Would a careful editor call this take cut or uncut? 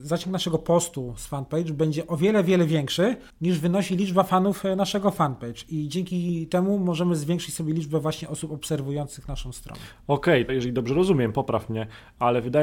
cut